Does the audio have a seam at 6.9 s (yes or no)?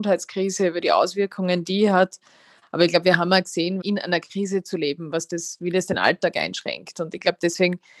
no